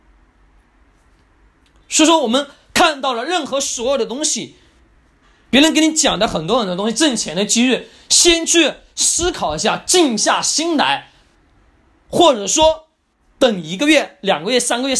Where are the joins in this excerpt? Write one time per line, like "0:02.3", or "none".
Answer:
none

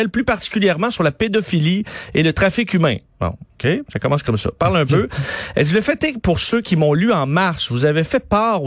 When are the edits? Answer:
none

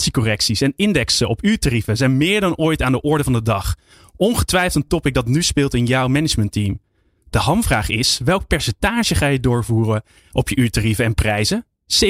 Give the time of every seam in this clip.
none

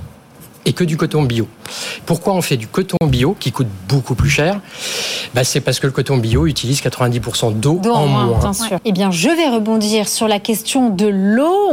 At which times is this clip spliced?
0:08.8

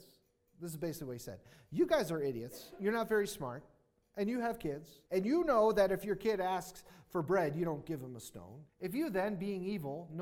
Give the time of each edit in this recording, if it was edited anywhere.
0:05.1
0:08.7

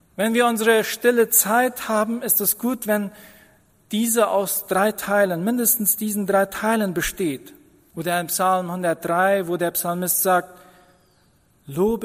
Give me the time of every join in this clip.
0:07.9

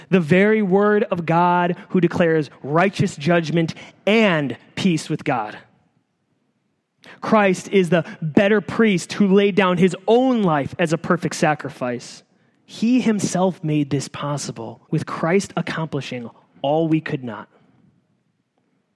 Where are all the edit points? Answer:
0:12.5
0:14.8

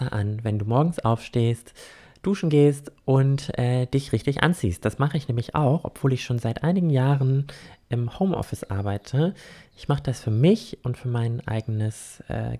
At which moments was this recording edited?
none

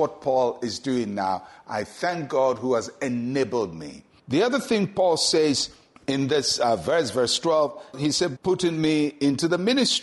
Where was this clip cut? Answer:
0:08.4

